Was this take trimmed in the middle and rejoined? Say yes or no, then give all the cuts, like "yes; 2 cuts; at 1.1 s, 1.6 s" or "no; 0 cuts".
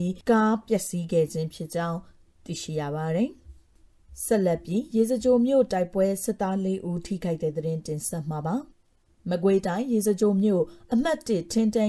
yes; 1 cut; at 8.7 s